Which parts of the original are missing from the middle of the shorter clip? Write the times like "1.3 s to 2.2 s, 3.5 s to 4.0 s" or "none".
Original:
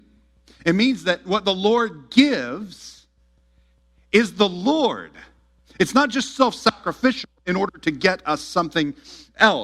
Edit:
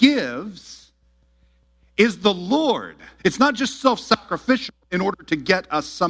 5.3 s to 5.7 s